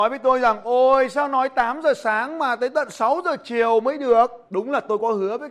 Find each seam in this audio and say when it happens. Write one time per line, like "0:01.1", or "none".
0:04.5